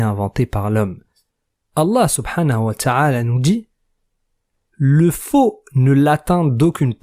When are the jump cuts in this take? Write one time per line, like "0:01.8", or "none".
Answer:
none